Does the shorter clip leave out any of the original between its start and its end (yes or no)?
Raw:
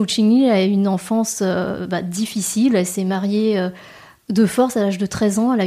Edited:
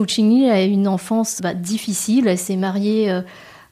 yes